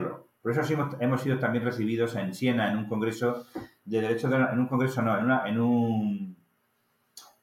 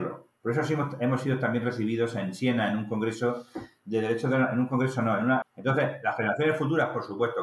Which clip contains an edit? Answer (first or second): second